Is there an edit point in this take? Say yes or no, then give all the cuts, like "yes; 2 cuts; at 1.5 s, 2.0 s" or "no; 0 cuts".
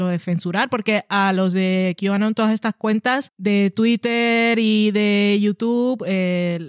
no; 0 cuts